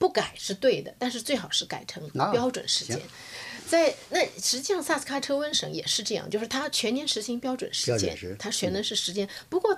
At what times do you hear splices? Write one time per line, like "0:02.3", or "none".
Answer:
none

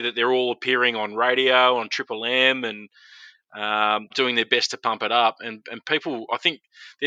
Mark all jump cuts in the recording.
0:04.1

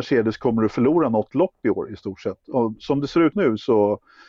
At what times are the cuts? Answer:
0:03.3

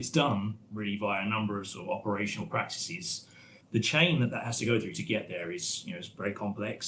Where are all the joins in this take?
0:03.6

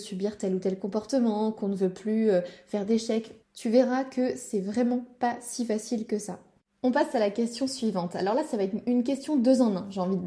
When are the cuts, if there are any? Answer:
0:03.4

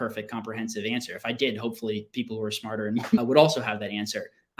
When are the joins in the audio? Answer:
0:03.2

